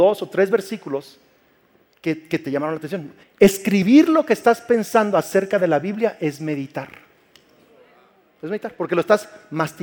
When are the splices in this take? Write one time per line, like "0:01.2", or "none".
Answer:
0:03.2